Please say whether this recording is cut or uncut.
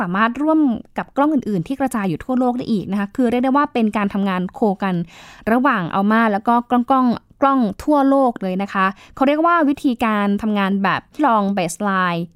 cut